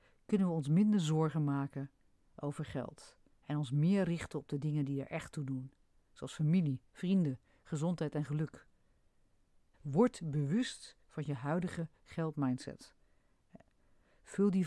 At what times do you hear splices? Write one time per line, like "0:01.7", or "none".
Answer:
0:09.7